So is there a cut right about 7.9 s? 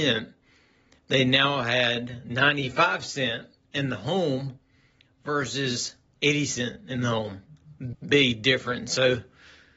yes; 1 cut; at 7.9 s

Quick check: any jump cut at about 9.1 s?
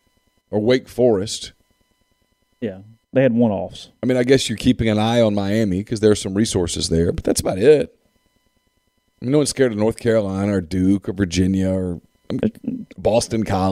no; 0 cuts

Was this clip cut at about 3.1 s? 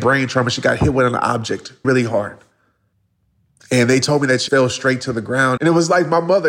no; 3 cuts; at 1.8 s, 4.5 s, 5.6 s

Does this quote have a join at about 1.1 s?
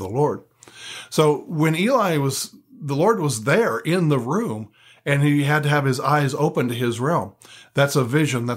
no; 0 cuts

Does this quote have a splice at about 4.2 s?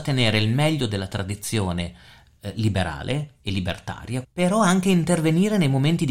yes; 1 cut; at 4.2 s

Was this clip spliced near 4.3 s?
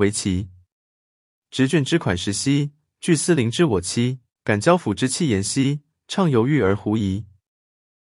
yes; 2 cuts; at 1.7 s, 4.3 s

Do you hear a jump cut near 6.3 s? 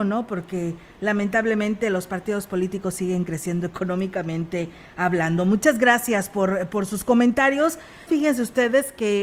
no; 1 cut; at 8.1 s

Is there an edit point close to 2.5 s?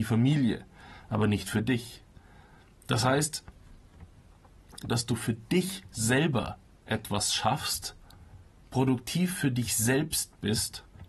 no; 1 cut; at 4.9 s

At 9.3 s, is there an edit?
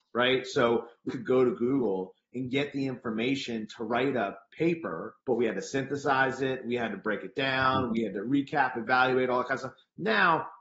no; 2 cuts; at 1.1 s, 5.2 s

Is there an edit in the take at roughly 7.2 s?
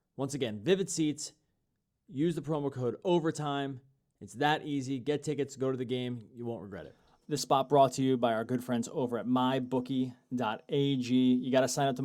yes; 1 cut; at 7.2 s

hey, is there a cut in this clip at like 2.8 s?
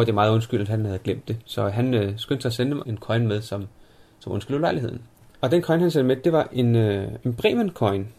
yes; 1 cut; at 2.8 s

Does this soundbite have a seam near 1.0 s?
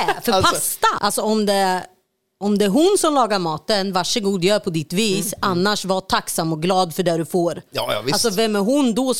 yes; 1 cut; at 1.0 s

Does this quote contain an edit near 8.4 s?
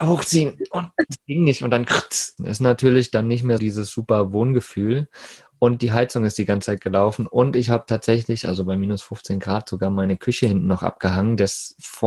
no; 2 cuts; at 2.4 s, 3.6 s

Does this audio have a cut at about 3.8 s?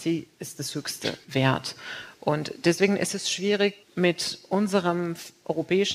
yes; 1 cut; at 3.8 s

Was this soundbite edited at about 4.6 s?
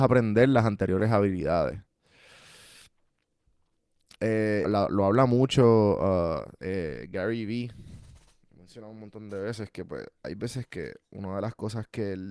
yes; 1 cut; at 4.6 s

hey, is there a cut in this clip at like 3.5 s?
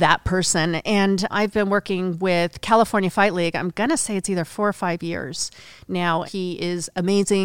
no; 2 cuts; at 1.3 s, 6.2 s

